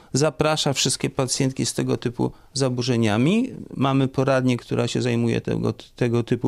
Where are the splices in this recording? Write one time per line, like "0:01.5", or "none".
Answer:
none